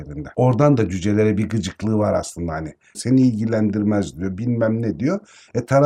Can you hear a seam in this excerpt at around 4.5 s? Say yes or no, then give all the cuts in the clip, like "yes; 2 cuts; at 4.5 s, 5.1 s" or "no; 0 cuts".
no; 1 cut; at 2.9 s